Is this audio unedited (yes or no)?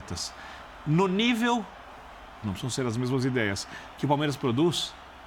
no